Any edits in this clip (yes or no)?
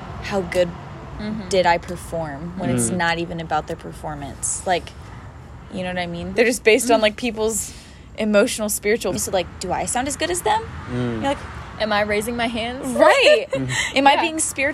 yes